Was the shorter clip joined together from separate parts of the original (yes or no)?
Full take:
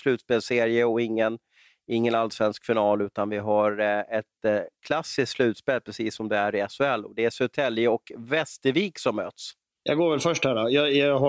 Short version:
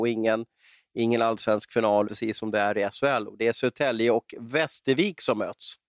yes